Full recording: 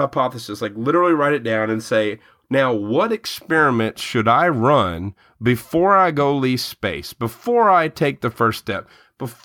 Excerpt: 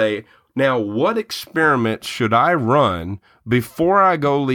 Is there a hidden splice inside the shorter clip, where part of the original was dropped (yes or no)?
no